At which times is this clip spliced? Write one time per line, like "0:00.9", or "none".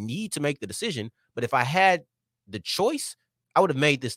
none